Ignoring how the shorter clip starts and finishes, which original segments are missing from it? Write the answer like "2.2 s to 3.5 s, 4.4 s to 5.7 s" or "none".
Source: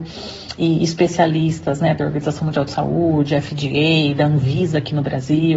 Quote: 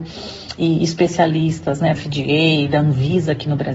1.9 s to 3.4 s

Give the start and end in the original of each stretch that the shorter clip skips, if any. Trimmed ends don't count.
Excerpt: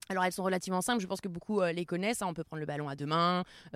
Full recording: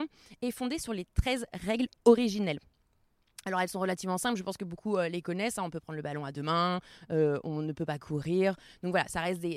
none

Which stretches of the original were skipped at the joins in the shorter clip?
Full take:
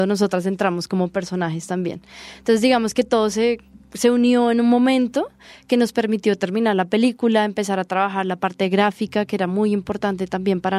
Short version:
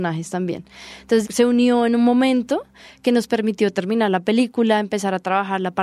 2.6 s to 3.9 s

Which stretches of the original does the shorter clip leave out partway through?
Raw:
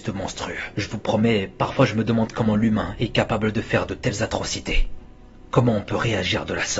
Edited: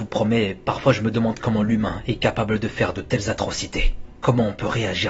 5.1 s to 5.4 s

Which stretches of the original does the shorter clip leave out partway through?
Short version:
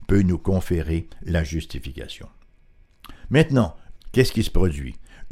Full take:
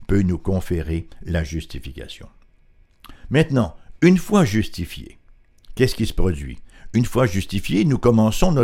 4.0 s to 5.6 s

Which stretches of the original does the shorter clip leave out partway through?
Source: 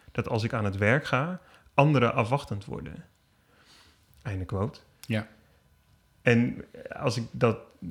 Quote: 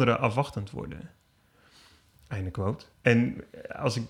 4.9 s to 6.1 s

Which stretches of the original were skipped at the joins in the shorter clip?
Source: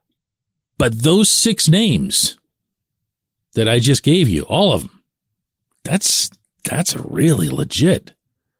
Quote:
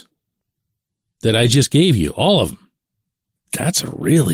5.7 s to 6.5 s

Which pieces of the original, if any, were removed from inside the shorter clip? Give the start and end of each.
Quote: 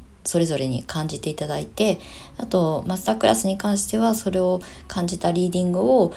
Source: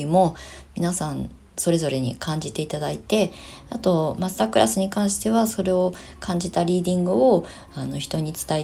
none

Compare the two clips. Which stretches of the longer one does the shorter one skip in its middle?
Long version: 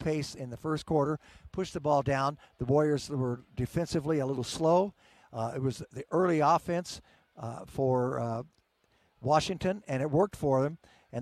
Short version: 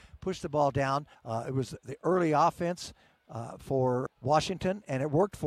2.5 s to 5.2 s, 8.1 s to 9.1 s

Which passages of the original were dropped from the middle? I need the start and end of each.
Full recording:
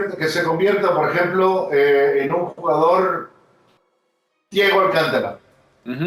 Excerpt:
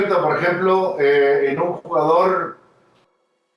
none

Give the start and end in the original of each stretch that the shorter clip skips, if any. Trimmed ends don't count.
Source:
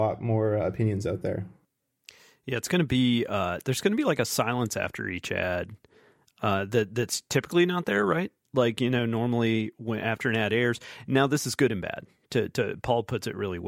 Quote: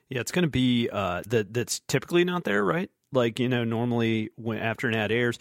3.6 s to 6.7 s

